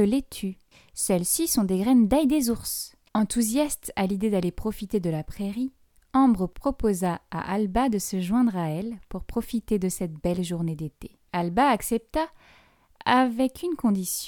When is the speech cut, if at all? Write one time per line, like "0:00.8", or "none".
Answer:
0:03.1
0:11.3